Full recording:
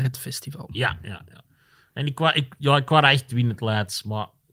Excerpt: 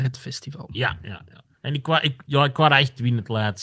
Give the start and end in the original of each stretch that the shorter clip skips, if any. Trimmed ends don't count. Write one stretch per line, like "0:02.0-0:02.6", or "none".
0:01.5-0:01.9